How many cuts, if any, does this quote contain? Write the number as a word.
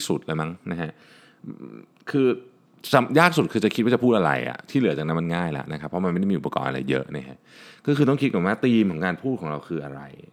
zero